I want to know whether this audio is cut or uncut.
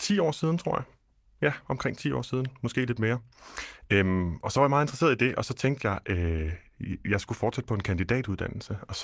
uncut